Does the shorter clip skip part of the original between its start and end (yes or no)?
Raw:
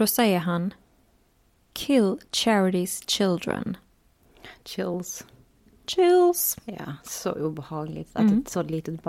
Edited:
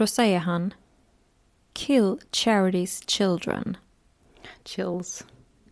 no